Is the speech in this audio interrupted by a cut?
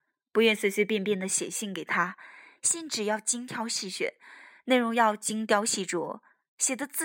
no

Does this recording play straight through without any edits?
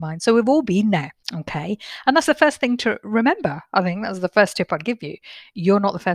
no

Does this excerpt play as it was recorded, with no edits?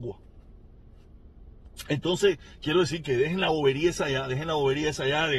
yes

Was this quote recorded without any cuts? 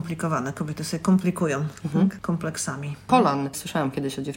no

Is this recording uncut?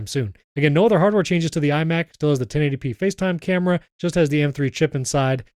no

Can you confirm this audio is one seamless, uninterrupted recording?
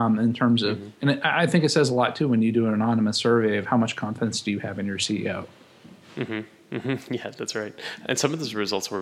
yes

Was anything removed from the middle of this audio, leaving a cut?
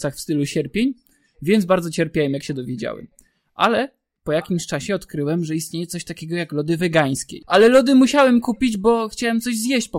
no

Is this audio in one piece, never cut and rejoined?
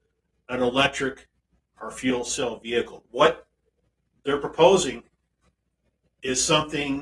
no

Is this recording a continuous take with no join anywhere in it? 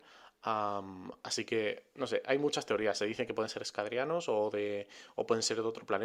yes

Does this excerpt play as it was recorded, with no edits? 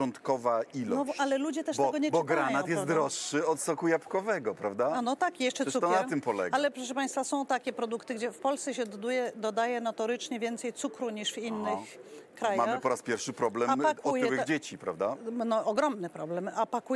yes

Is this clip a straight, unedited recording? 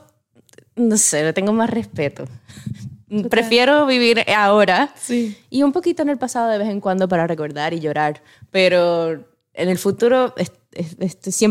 yes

